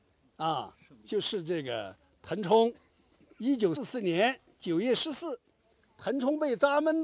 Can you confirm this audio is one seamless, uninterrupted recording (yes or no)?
no